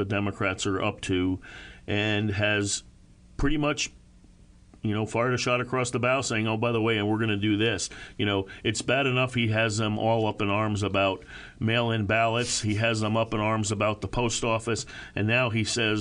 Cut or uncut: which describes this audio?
uncut